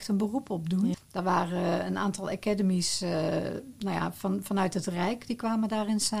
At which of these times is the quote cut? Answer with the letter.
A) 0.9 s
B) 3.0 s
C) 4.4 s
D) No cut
A